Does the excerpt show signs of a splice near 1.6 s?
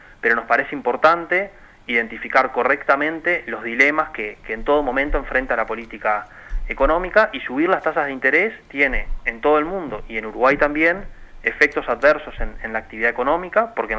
no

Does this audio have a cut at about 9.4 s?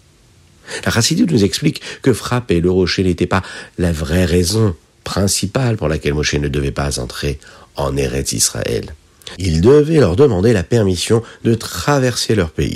yes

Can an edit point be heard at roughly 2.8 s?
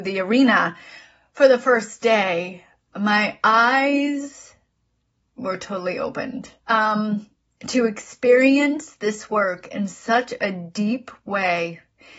no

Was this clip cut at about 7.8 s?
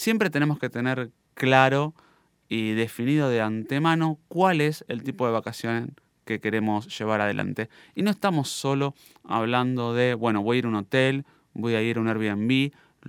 no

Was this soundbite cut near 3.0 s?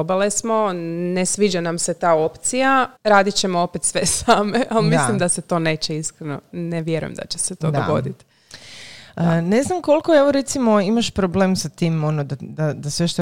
yes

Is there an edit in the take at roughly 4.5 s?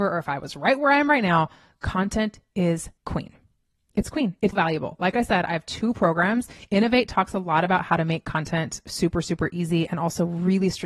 yes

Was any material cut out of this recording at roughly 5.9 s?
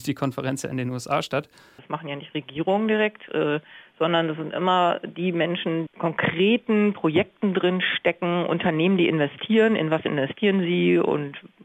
yes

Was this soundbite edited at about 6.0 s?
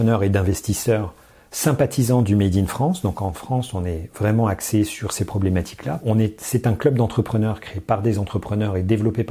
yes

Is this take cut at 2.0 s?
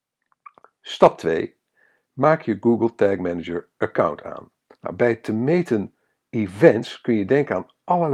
no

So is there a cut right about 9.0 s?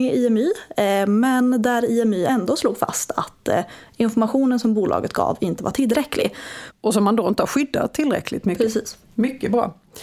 yes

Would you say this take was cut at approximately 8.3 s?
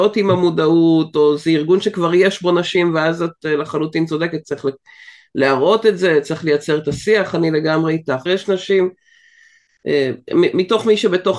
yes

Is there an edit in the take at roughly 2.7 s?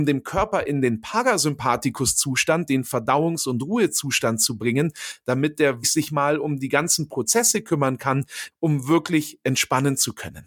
no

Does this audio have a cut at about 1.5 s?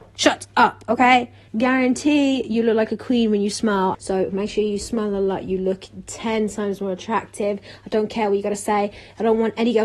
yes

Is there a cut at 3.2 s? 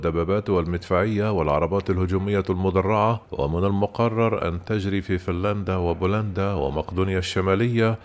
yes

